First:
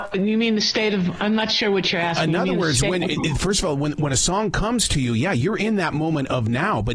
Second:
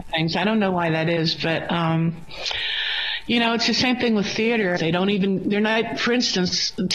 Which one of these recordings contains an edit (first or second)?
second